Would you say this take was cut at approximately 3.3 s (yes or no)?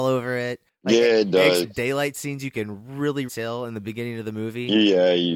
yes